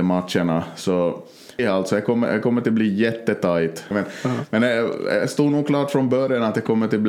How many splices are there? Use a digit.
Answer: 2